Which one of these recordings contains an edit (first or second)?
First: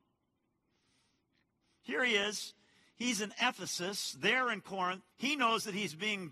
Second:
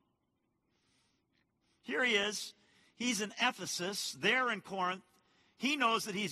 first